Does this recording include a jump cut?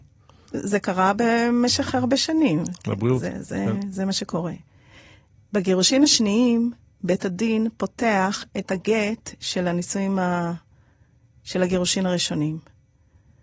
no; 0 cuts

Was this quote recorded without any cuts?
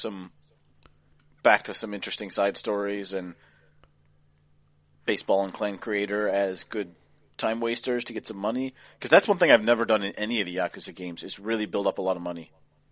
yes; 0 cuts

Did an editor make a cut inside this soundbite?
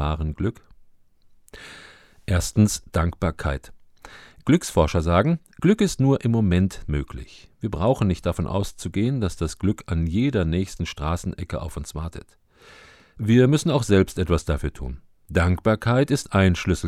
no; 0 cuts

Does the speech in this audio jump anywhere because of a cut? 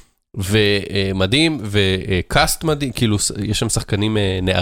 no; 0 cuts

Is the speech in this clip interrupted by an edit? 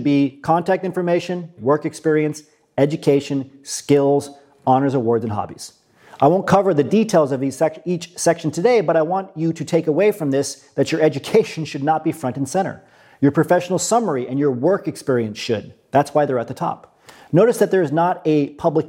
yes; 1 cut; at 1.6 s

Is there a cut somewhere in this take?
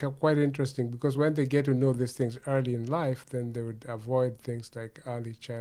no; 0 cuts

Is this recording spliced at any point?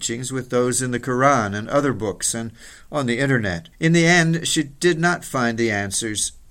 yes; 1 cut; at 3.7 s

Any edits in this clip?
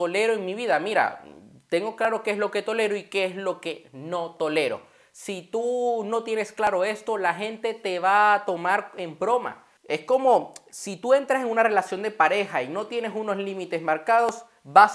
yes; 1 cut; at 9.8 s

